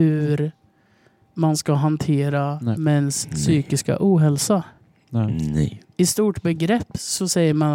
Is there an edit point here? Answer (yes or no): no